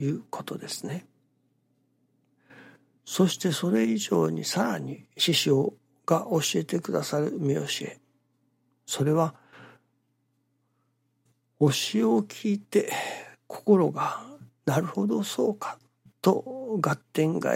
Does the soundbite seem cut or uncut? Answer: cut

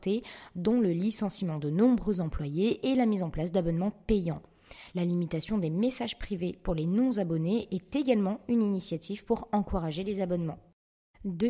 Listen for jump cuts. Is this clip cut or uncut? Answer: uncut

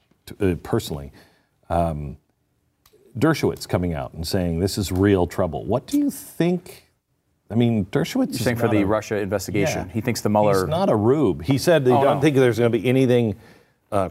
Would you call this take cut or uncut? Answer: uncut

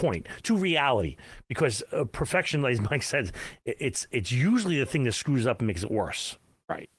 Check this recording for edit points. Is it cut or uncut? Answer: uncut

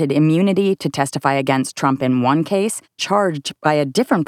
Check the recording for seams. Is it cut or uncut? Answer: cut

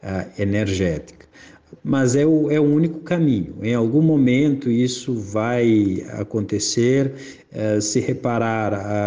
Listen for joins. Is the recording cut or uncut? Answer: cut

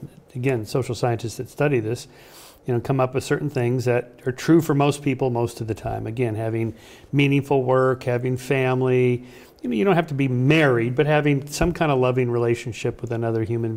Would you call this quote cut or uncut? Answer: uncut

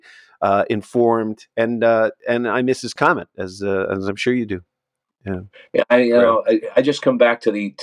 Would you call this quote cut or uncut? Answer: uncut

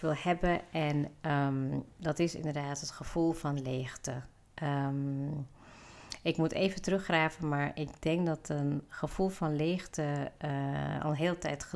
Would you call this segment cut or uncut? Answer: uncut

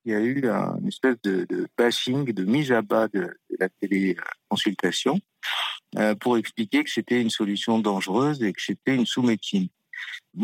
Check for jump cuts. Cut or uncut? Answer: uncut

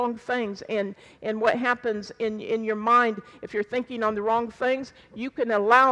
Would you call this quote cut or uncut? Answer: uncut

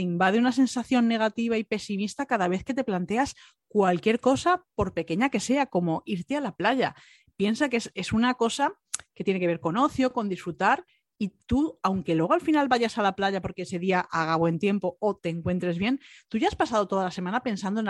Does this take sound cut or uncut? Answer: uncut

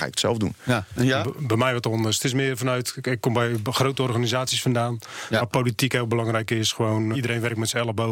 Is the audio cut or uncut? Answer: cut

